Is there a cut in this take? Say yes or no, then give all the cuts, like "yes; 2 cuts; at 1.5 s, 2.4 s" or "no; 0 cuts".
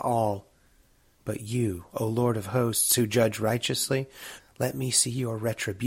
yes; 2 cuts; at 1.1 s, 4.4 s